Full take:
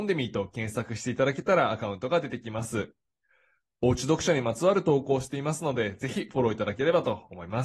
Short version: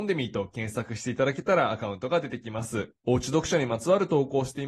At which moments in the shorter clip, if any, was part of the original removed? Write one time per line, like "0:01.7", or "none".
0:03.0